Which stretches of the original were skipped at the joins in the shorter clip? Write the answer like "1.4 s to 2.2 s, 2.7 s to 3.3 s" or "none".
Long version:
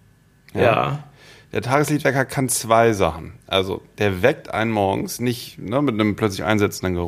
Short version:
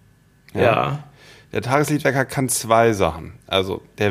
none

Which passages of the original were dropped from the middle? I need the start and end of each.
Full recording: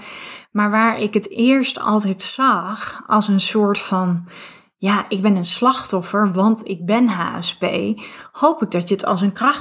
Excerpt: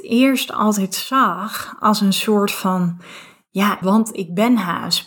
5.1 s to 6.3 s

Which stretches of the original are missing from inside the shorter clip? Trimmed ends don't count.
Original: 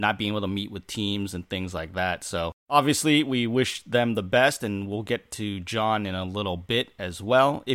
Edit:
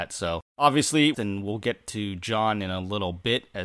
3.3 s to 4.6 s

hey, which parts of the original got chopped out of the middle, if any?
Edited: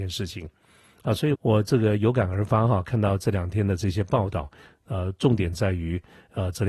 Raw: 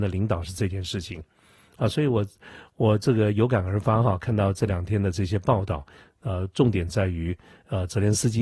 2.1 s to 2.7 s

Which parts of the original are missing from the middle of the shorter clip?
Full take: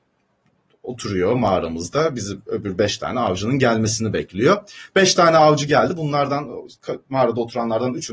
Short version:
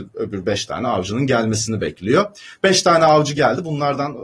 none

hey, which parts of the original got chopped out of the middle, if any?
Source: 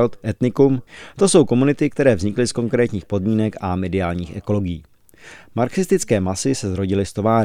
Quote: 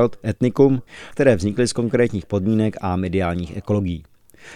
1.1 s to 1.9 s

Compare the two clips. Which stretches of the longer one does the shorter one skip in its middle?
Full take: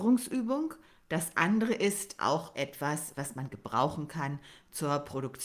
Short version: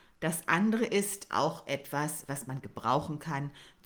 none

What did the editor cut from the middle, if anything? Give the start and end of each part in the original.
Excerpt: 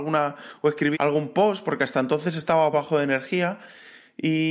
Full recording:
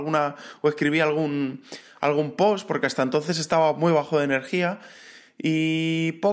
0.9 s to 2.0 s, 3.8 s to 3.9 s

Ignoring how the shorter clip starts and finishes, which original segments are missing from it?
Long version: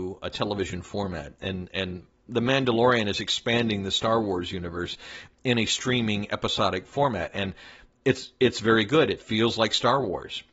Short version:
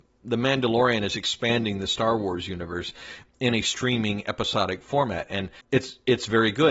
7.6 s to 7.9 s

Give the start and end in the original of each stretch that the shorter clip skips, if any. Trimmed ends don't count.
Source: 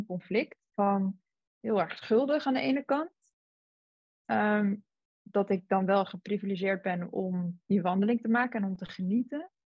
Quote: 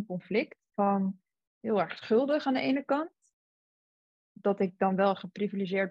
4.2 s to 5.1 s

